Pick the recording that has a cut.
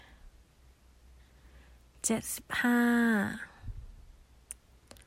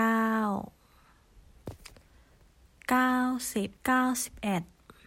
second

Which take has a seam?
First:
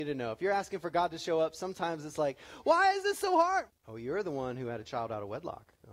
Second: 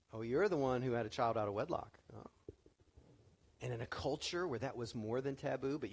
first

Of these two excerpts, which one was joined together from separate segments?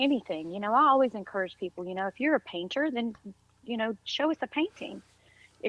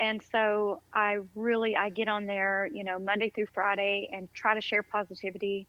second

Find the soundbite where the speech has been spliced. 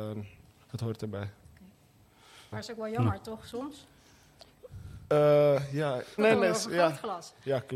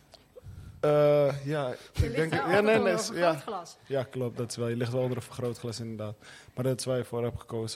first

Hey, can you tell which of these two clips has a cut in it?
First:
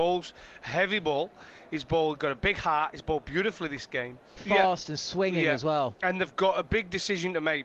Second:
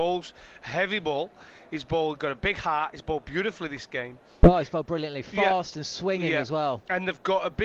first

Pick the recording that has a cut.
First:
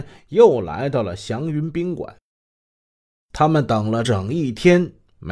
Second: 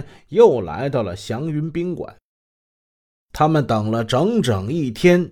first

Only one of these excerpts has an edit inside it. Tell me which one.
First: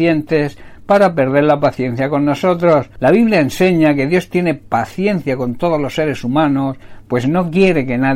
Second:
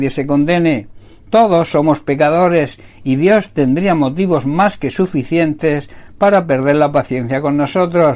first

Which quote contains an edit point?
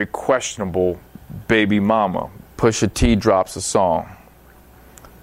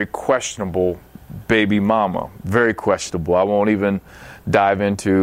first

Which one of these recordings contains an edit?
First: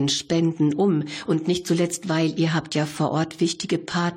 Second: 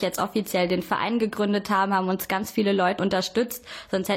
second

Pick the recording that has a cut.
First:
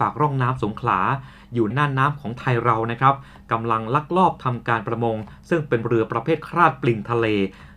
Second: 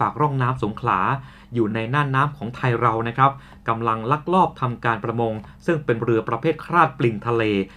first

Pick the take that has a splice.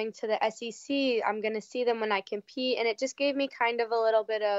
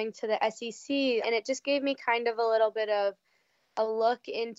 second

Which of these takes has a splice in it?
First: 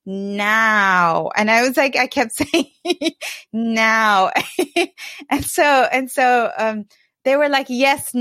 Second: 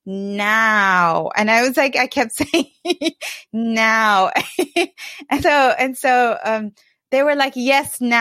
second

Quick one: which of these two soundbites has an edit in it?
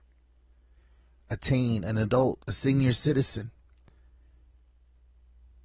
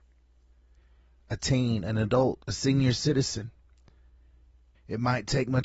second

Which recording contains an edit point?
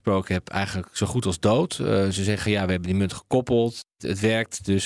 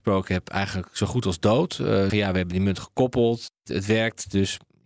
second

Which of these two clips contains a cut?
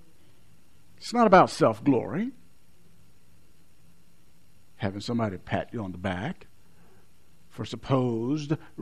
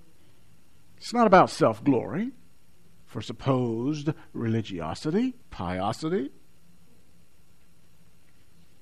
second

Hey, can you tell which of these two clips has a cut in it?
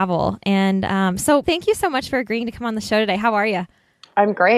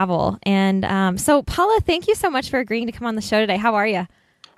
first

